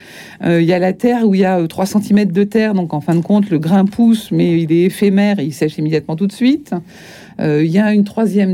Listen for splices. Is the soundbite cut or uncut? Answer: uncut